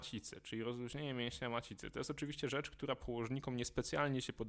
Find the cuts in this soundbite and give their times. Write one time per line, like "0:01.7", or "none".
none